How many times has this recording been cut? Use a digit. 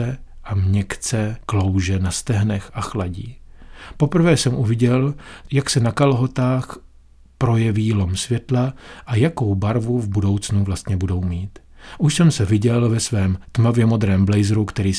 0